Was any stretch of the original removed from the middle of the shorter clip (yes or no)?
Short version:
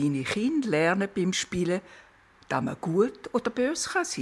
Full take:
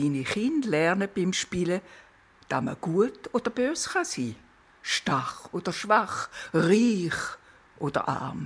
no